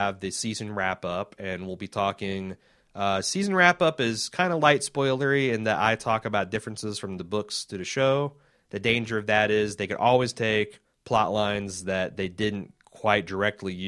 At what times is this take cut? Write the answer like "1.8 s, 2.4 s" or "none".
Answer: none